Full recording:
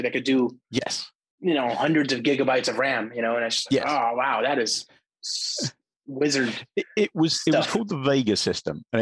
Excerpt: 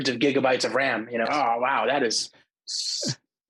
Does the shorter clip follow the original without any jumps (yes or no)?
no